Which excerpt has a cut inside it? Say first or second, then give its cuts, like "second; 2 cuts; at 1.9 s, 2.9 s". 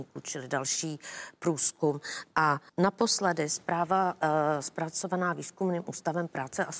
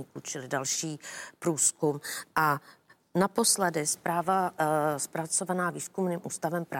first; 1 cut; at 2.7 s